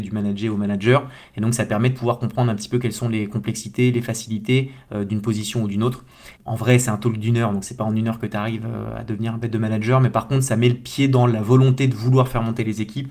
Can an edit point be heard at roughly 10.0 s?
no; 1 cut; at 6.4 s

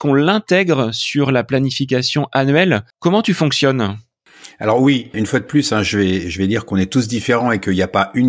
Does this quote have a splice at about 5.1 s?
yes; 2 cuts; at 2.9 s, 5.1 s

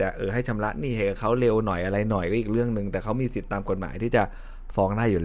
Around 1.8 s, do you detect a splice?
no; 0 cuts

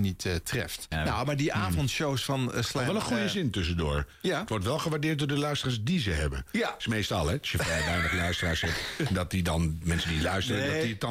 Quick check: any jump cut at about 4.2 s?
no; 1 cut; at 0.9 s

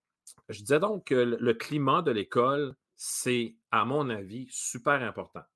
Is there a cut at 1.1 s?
no; 1 cut; at 2.8 s

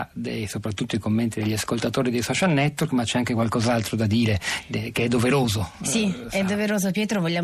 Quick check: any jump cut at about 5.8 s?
no; 0 cuts

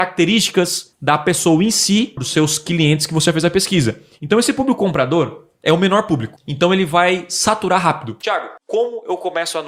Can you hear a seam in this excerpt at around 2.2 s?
yes; 2 cuts; at 2.2 s, 8.2 s

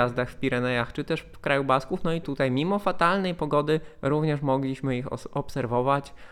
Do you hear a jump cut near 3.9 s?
no; 1 cut; at 2.2 s

